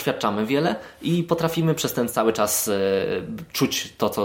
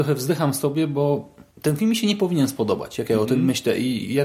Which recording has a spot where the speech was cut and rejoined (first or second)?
second